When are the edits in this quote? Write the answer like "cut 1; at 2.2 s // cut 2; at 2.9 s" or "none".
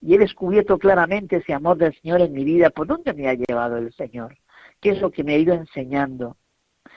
none